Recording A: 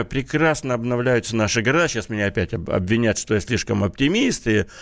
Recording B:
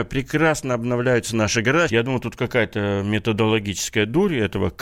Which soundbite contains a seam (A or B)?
B